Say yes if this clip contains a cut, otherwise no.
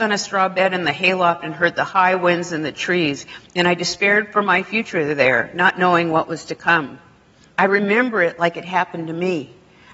no